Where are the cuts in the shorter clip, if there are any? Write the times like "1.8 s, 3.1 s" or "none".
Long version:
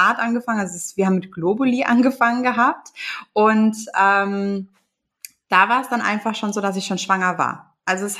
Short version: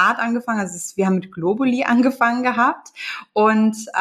none